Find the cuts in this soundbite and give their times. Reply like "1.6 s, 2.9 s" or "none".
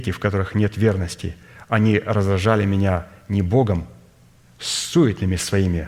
none